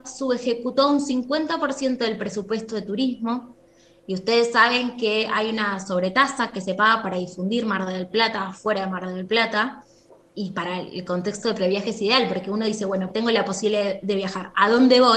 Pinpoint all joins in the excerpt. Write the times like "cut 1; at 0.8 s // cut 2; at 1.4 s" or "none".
cut 1; at 13.1 s